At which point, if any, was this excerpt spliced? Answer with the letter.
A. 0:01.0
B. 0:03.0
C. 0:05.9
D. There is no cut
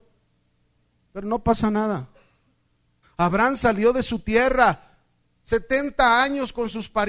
B